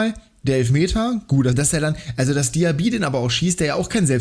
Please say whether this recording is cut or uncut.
cut